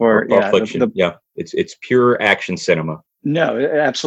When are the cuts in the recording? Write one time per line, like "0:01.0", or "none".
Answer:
0:01.2